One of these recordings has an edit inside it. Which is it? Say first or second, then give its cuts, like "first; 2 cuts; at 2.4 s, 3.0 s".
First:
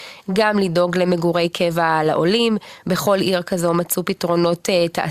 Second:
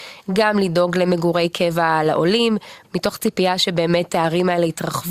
second; 1 cut; at 2.8 s